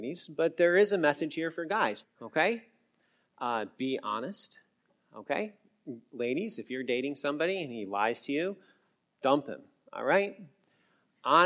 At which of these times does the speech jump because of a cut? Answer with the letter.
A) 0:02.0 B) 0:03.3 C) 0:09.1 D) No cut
A